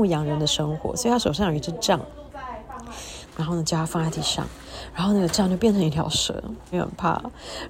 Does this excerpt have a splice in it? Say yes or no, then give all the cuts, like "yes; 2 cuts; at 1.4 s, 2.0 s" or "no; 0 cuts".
yes; 2 cuts; at 3.3 s, 6.7 s